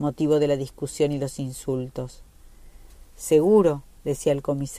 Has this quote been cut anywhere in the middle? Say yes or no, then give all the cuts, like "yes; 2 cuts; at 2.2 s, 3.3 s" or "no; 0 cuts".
no; 0 cuts